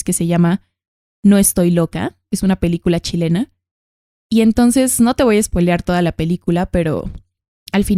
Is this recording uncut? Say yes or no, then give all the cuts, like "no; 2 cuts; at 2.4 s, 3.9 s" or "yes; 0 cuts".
yes; 0 cuts